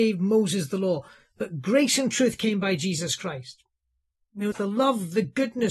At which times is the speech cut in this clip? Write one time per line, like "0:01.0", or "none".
0:04.5

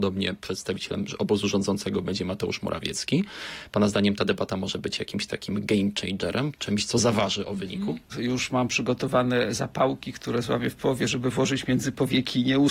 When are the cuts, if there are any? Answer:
0:06.5
0:08.1

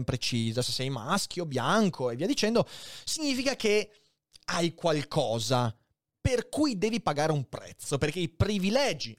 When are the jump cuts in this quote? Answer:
none

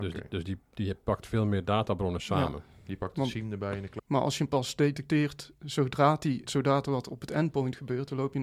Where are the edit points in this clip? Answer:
0:04.0
0:06.5

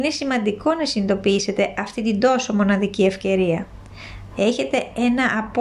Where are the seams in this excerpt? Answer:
0:04.3

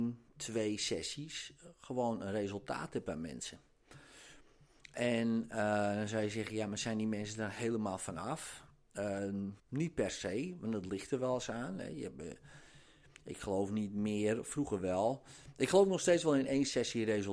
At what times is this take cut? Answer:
0:09.6

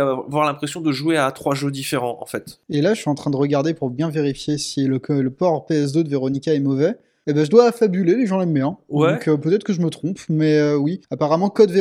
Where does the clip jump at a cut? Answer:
none

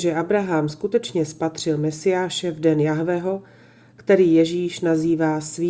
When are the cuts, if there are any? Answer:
none

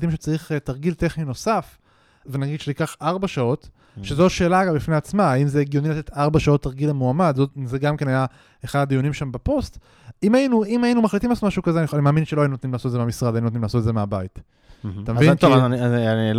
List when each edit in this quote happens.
0:02.2

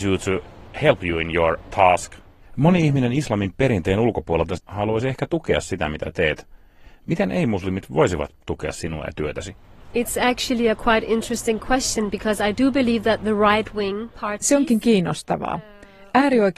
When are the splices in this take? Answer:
0:04.6

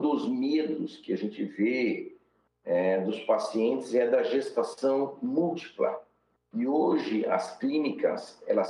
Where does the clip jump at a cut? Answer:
0:06.4

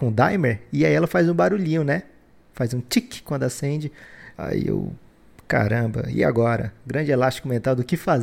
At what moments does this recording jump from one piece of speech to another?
0:04.3

